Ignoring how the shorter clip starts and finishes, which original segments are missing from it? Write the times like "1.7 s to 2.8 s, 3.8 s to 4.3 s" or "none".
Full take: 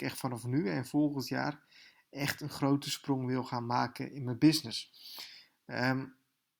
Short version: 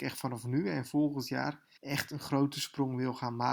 1.8 s to 2.1 s